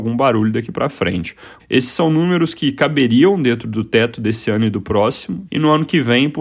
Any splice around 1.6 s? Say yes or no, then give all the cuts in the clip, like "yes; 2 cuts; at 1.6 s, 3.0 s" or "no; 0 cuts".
yes; 2 cuts; at 1.6 s, 5.5 s